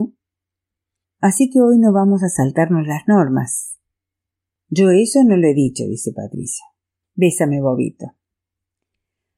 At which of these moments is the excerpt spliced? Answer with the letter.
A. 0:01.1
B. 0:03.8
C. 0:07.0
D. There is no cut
D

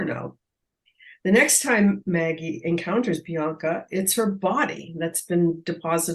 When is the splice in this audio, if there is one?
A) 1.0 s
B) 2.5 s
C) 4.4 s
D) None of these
D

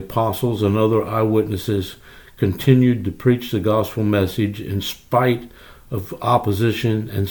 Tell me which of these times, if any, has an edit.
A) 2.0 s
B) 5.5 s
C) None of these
C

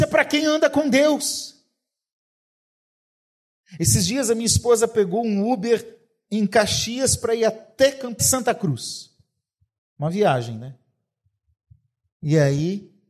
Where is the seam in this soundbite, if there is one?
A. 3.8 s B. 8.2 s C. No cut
B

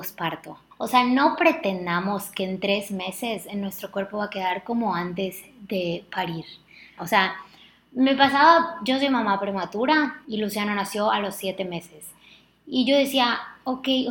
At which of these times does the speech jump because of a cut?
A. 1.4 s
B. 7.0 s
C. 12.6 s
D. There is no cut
B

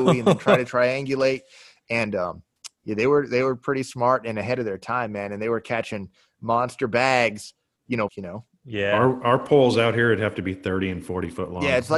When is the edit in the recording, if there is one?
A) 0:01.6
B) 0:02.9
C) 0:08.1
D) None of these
C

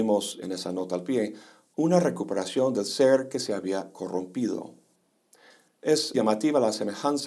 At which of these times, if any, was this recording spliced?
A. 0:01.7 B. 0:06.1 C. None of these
B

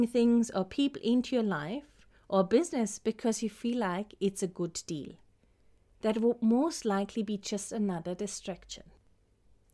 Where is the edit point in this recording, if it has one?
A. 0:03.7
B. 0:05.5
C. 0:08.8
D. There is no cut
D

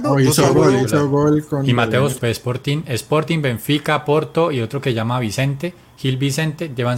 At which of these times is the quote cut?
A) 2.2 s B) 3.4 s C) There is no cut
A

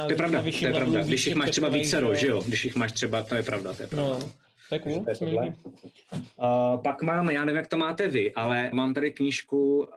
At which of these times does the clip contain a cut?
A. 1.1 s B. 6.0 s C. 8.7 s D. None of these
C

